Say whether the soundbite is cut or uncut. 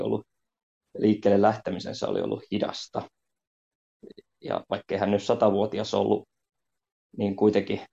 uncut